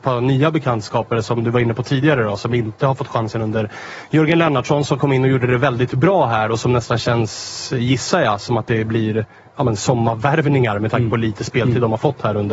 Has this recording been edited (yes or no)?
no